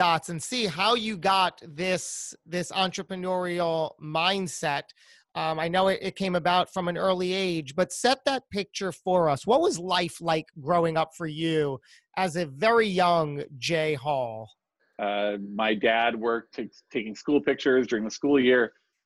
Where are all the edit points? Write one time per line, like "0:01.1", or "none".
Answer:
0:14.8
0:16.5